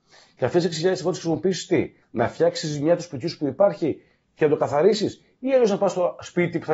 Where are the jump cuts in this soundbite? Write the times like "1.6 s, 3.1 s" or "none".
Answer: 2.0 s